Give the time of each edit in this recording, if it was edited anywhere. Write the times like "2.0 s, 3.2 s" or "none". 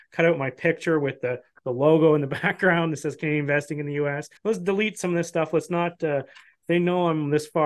4.4 s

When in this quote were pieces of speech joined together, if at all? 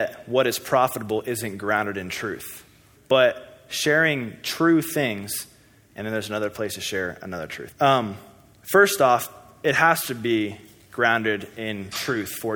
3.0 s, 5.9 s, 7.7 s

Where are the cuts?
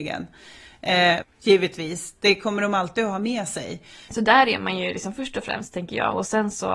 1.2 s, 4.1 s

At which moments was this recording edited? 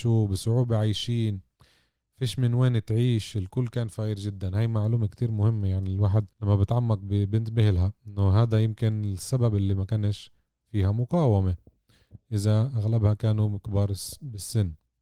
5.1 s, 6.3 s

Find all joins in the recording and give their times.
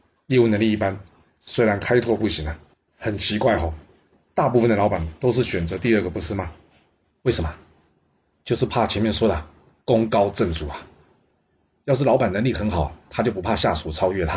2.9 s

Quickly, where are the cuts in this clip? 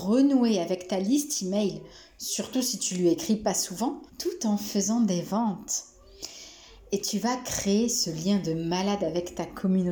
4.1 s

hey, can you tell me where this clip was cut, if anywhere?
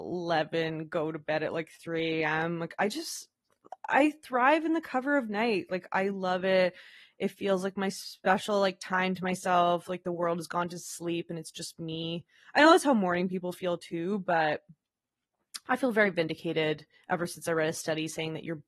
none

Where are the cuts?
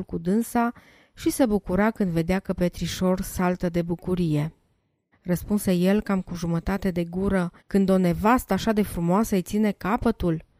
5.1 s, 7.6 s

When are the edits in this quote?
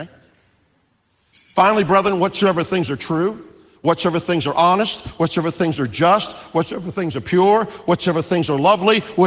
none

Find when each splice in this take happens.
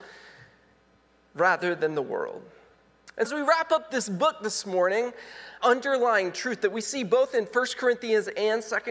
3.2 s, 5.6 s

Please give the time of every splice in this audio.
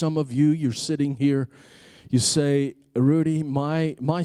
none

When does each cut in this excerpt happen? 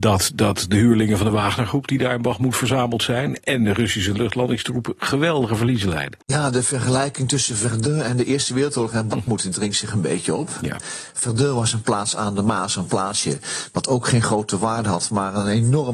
6.2 s

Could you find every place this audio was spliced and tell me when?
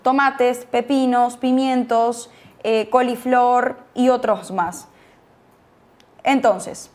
none

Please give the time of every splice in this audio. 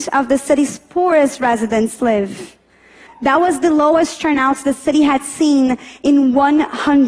3.1 s

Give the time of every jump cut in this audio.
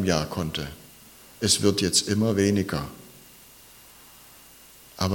none

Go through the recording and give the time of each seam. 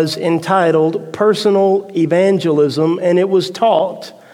none

